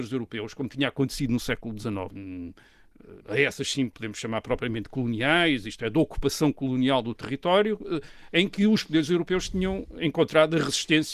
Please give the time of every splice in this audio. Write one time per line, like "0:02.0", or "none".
0:02.1
0:03.2